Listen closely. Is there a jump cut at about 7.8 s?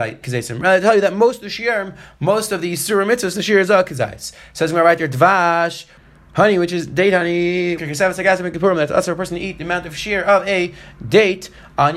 yes; 1 cut; at 7.8 s

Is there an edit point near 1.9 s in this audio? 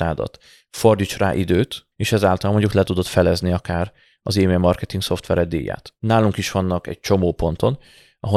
yes; 2 cuts; at 1.9 s, 6.0 s

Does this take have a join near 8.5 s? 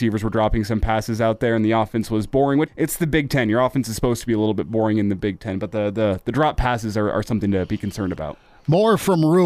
no; 1 cut; at 2.7 s

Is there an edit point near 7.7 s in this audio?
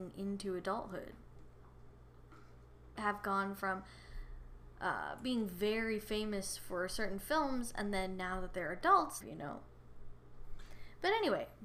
no; 2 cuts; at 3.0 s, 9.2 s

